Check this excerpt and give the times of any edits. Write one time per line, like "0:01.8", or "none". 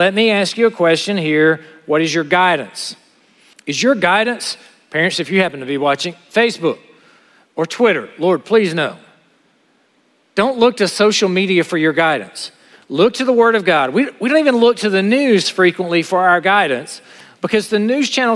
0:03.5